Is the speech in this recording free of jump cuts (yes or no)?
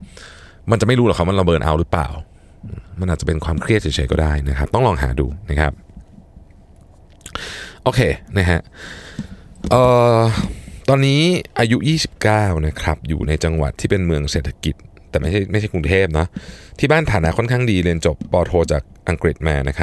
yes